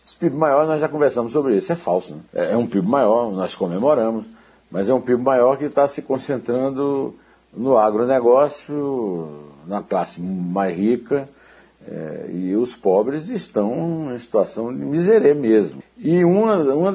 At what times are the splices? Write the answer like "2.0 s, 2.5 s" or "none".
2.3 s, 15.8 s